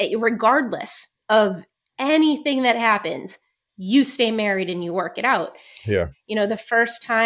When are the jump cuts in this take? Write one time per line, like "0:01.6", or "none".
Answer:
0:06.1